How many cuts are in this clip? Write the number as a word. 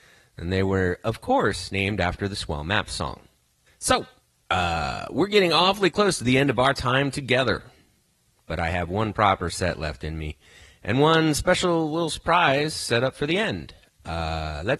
one